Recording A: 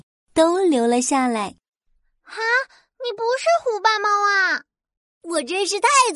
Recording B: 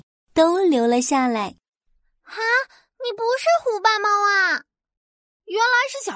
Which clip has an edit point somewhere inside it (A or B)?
A